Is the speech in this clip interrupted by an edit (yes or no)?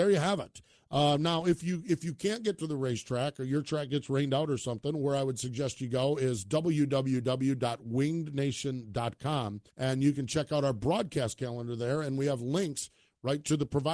yes